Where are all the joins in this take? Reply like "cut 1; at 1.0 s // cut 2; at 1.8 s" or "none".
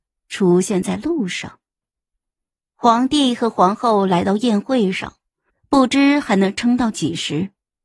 cut 1; at 5.5 s